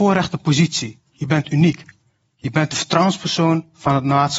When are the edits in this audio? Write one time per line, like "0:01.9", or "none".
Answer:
none